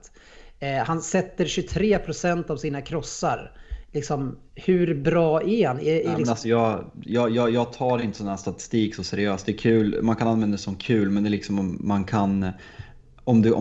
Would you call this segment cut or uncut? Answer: uncut